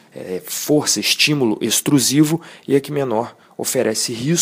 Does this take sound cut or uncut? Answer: uncut